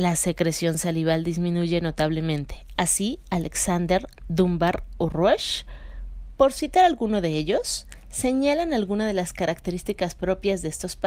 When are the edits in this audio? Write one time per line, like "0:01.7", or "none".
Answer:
0:02.8

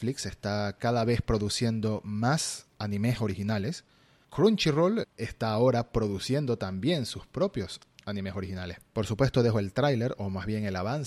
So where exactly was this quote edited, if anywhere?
0:05.0
0:08.9

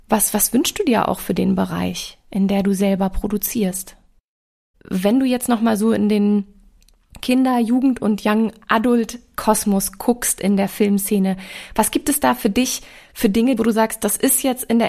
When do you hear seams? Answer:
0:04.7
0:13.6

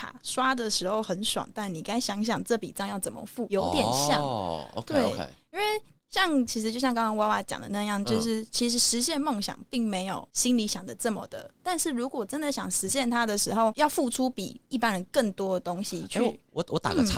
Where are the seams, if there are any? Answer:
0:11.6

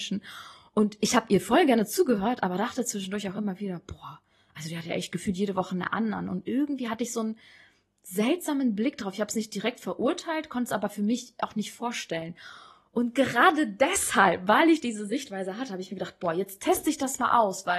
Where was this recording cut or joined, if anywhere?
none

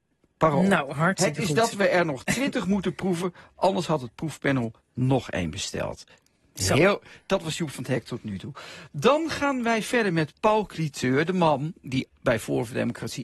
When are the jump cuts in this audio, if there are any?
none

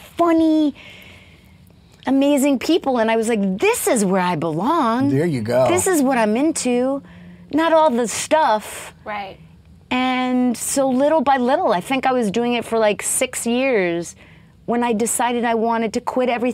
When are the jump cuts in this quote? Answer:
none

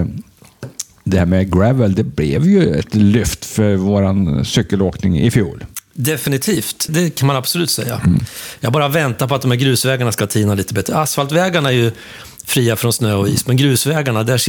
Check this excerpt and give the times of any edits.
0:06.9
0:08.6

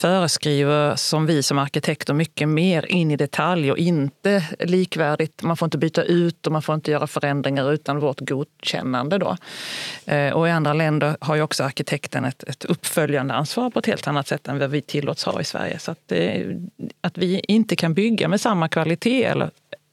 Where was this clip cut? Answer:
none

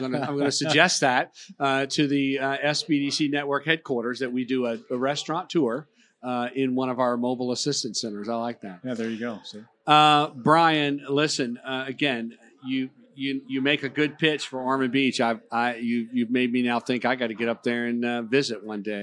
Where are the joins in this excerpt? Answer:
none

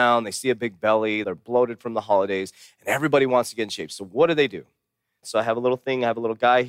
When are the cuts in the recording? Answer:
0:01.2
0:05.2

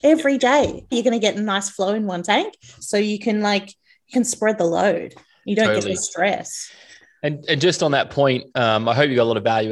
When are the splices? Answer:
0:00.9
0:02.8

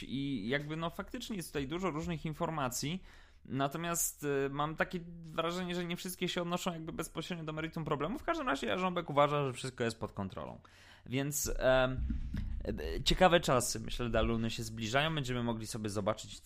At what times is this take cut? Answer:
none

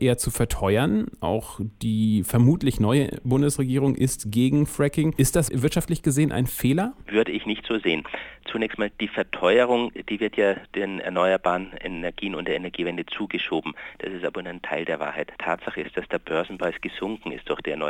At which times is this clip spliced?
0:15.4

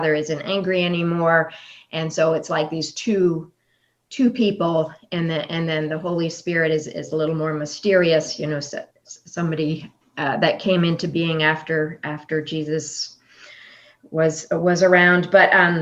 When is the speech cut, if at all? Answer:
0:08.9

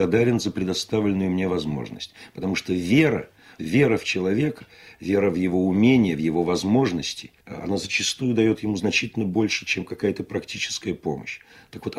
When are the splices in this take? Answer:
0:07.4

